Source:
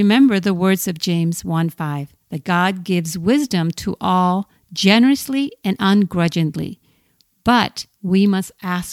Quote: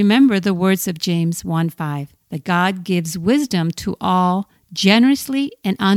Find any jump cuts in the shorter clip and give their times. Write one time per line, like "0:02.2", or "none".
none